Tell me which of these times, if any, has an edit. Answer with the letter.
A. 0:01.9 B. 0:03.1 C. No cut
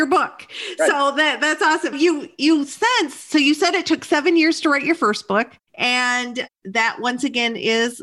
A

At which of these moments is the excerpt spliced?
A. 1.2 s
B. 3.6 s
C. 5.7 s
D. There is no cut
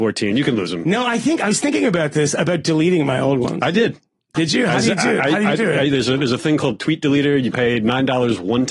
D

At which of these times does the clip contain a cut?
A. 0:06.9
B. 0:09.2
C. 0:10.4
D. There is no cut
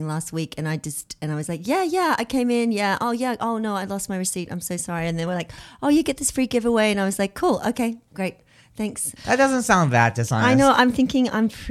B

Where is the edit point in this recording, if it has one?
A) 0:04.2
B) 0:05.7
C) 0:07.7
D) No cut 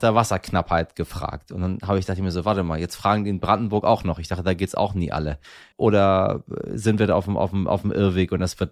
B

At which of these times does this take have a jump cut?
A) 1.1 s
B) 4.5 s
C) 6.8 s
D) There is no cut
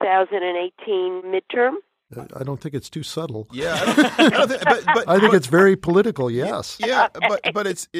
D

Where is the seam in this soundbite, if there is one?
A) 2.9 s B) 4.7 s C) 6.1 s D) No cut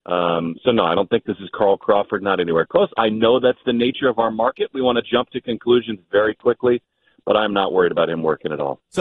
D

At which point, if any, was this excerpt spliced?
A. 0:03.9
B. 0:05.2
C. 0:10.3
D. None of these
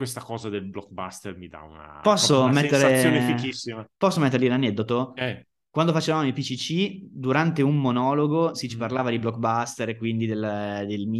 D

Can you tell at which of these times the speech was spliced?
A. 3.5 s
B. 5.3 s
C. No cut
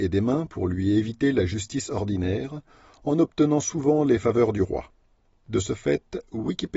B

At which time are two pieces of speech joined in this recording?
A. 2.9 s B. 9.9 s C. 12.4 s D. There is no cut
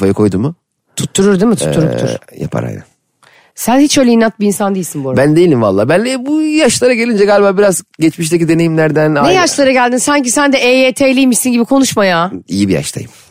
D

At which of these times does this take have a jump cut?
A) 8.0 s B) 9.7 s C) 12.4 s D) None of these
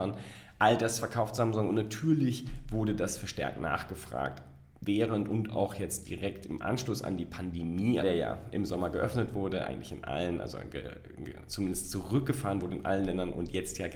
A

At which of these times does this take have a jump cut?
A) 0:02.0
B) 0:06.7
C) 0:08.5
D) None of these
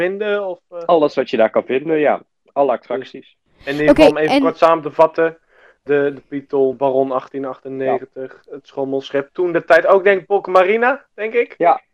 B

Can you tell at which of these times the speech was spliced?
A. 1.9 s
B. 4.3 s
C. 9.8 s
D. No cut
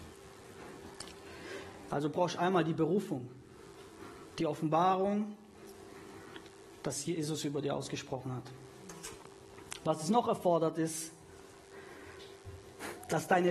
A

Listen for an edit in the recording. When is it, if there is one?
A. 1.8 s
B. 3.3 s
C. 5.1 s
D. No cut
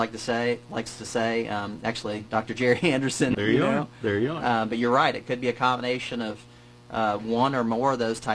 B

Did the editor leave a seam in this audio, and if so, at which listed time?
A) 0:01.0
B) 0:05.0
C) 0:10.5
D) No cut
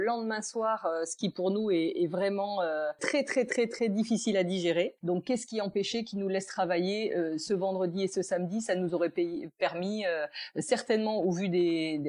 B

